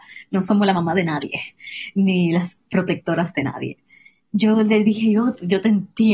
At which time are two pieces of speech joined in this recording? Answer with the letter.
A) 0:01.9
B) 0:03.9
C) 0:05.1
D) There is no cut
D